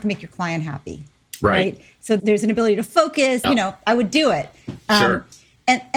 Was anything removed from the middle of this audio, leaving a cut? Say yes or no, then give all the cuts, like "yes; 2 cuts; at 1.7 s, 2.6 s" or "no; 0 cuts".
yes; 2 cuts; at 2.2 s, 3.4 s